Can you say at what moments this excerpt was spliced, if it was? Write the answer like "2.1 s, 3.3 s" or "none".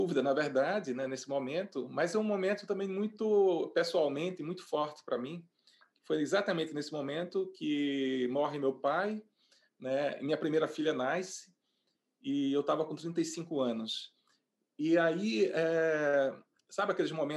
none